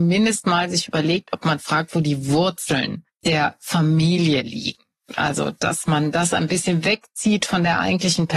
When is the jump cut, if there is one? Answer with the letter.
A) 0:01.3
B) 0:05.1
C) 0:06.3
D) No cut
B